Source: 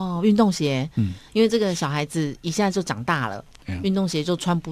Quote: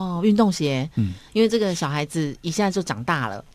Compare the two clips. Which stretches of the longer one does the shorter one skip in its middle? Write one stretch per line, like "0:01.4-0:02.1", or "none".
none